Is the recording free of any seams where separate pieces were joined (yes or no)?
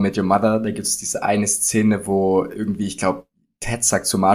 yes